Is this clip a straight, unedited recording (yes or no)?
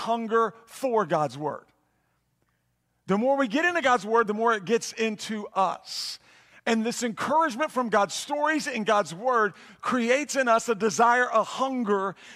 yes